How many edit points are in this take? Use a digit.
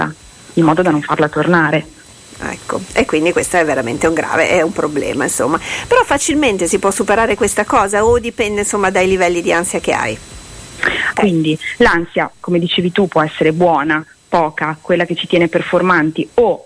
1